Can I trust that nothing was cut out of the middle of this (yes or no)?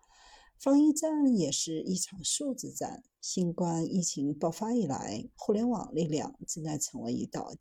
no